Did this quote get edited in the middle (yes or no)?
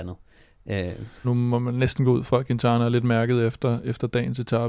yes